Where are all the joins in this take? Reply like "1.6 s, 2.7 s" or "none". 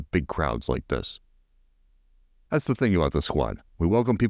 2.5 s